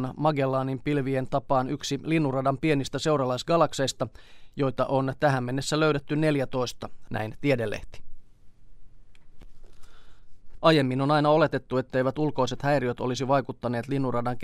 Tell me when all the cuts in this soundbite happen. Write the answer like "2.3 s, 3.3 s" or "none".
7.1 s, 10.6 s